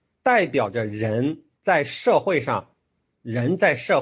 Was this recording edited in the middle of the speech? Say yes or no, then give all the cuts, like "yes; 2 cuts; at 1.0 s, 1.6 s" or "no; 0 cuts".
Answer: no; 0 cuts